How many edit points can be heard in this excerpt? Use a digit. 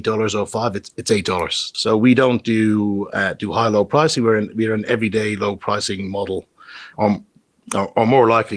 2